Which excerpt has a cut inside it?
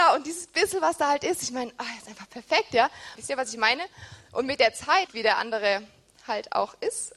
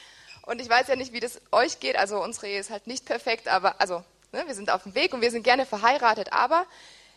first; 2 cuts; at 3.2 s, 5.1 s

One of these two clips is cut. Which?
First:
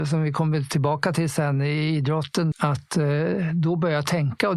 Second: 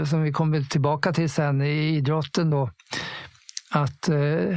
first; 1 cut; at 2.5 s

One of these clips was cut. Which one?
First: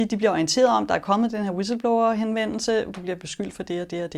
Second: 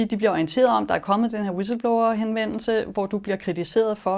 first; 1 cut; at 2.9 s

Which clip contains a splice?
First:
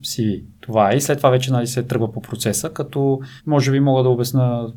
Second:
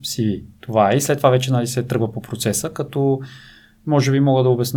first; 1 cut; at 3.4 s

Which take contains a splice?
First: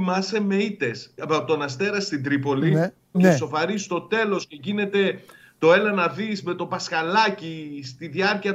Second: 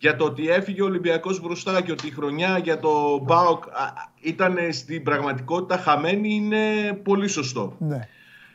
first; 2 cuts; at 1.2 s, 3.1 s

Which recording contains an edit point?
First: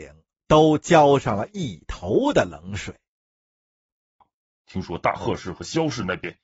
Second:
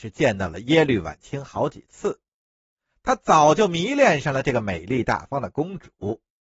first; 1 cut; at 4.2 s

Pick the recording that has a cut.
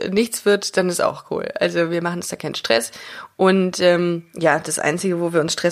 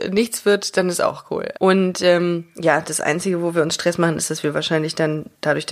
second; 1 cut; at 1.5 s

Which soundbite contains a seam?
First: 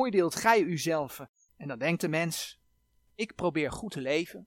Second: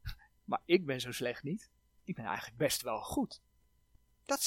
first; 1 cut; at 1.5 s

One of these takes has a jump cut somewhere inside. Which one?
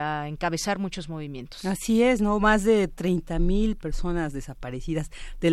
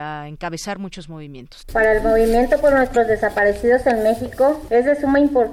second; 1 cut; at 1.6 s

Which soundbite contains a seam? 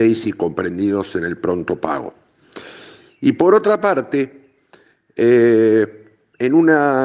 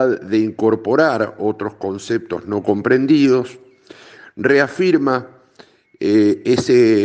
first; 1 cut; at 3.1 s

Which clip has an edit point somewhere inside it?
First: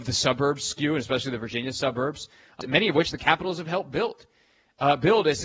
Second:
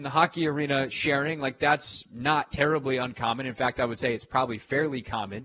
first; 1 cut; at 2.6 s

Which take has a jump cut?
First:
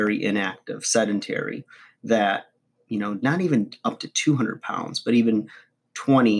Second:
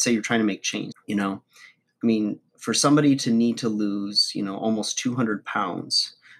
second; 1 cut; at 0.9 s

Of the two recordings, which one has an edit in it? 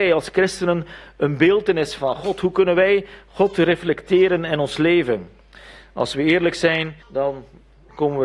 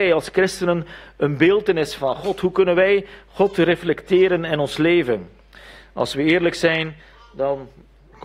first; 1 cut; at 7.0 s

